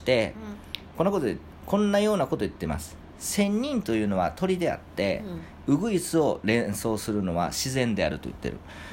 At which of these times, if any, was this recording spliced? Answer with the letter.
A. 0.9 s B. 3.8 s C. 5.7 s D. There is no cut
A